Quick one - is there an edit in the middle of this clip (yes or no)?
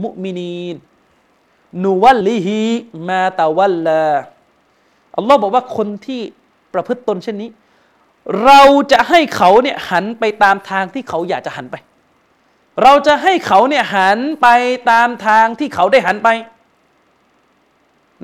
yes